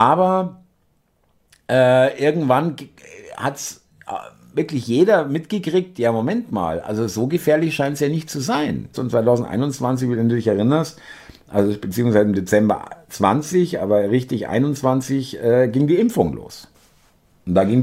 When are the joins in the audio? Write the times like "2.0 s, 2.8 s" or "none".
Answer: 8.9 s